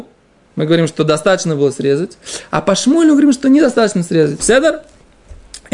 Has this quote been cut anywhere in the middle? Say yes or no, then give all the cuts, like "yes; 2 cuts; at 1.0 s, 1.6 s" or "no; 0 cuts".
yes; 1 cut; at 4.4 s